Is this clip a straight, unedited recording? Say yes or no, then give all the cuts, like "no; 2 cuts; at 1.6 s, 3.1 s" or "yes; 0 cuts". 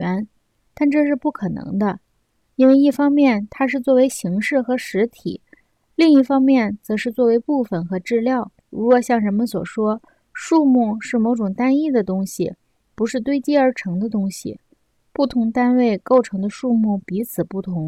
no; 1 cut; at 8.7 s